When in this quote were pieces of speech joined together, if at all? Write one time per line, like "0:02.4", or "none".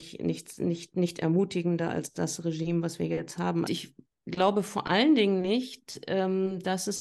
0:03.6